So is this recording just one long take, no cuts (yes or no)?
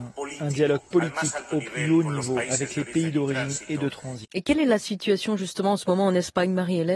no